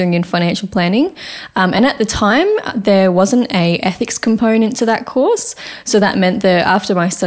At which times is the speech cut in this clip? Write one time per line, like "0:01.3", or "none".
none